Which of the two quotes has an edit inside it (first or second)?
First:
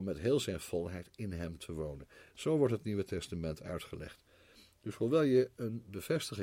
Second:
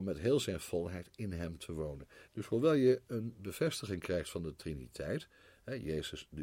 second